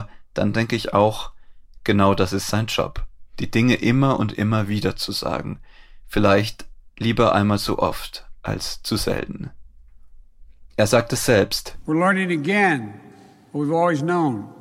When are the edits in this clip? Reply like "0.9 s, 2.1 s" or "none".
none